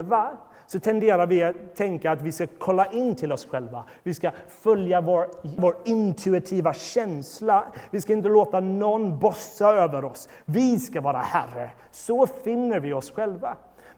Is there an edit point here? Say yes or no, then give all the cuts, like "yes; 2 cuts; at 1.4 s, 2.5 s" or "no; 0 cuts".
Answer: yes; 1 cut; at 5.6 s